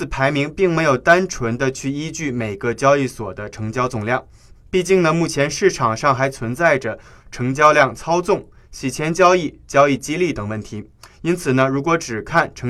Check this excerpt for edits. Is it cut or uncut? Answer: uncut